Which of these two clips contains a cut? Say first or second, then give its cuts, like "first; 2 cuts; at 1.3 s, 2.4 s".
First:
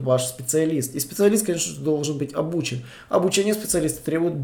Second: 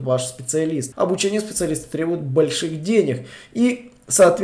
second; 1 cut; at 0.9 s